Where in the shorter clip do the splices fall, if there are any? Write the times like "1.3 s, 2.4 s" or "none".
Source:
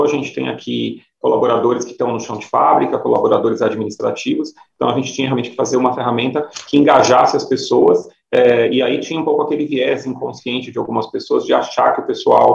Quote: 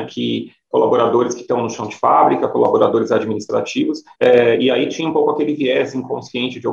4.1 s